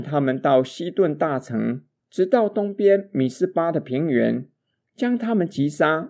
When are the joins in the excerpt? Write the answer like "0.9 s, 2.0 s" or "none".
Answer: 2.0 s

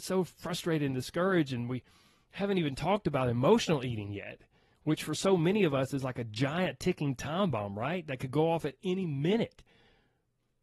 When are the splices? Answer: none

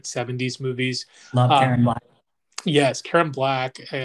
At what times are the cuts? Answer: none

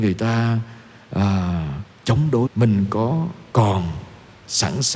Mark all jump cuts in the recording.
2.5 s

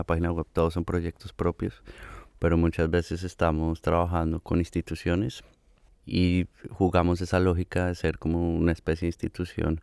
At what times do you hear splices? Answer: none

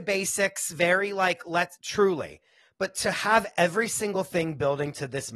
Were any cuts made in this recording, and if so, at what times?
1.8 s

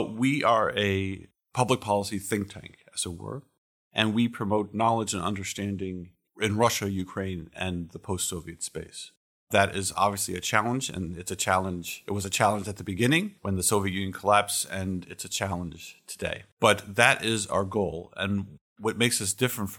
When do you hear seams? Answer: 16.5 s

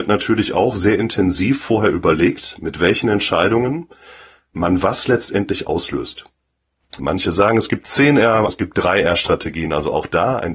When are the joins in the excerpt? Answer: 7.0 s, 8.5 s

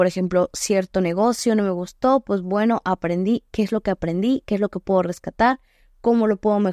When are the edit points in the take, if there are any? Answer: none

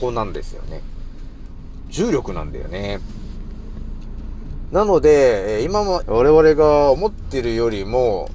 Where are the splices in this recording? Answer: 4.7 s, 6.0 s

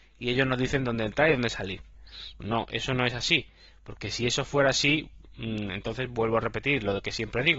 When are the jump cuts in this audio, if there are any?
2.4 s

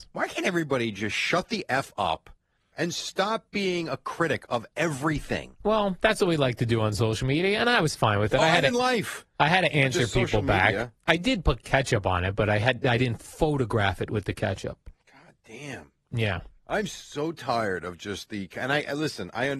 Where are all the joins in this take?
2.7 s

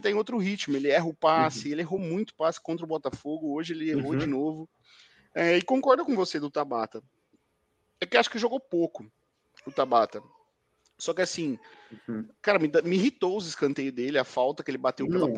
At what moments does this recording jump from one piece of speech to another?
none

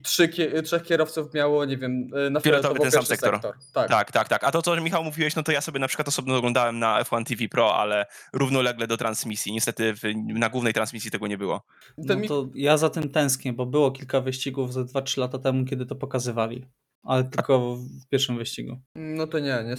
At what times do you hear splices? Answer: 18.9 s

